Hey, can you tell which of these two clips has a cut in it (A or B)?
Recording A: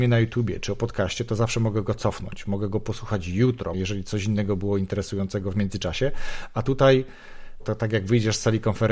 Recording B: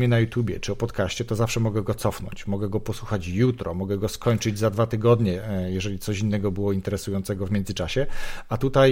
A